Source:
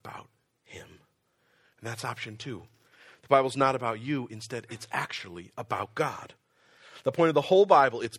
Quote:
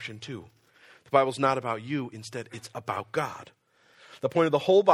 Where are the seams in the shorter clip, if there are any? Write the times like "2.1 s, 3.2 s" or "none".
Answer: 2.7 s